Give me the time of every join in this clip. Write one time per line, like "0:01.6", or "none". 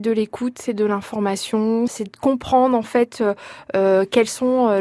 0:01.9